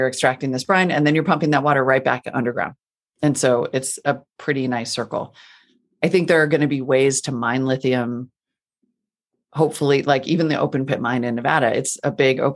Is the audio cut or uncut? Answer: uncut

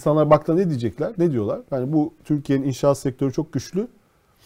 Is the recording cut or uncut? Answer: uncut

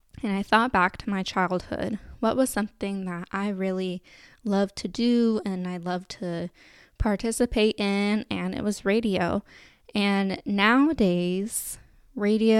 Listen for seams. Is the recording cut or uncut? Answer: uncut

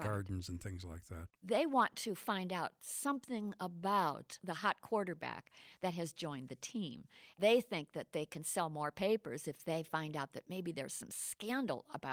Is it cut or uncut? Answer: uncut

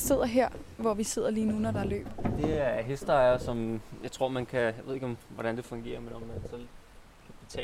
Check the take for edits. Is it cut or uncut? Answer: uncut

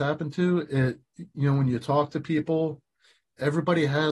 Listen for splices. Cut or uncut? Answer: uncut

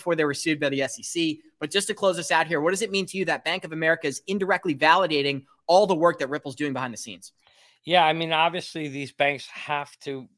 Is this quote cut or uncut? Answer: uncut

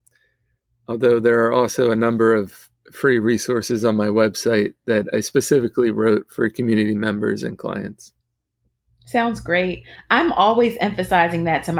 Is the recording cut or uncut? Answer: uncut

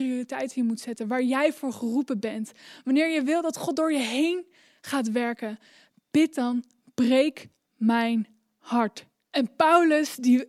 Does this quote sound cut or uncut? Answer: cut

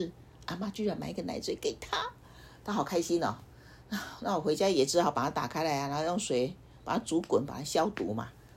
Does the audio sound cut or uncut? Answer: uncut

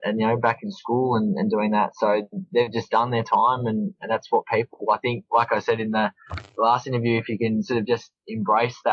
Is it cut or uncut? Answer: uncut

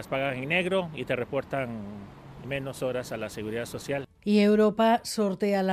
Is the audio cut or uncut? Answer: cut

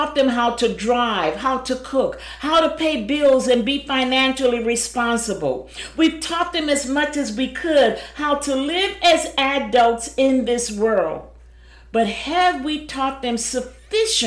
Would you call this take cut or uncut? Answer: uncut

